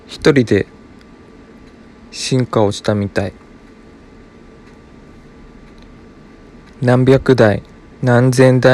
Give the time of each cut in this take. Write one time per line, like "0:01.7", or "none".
none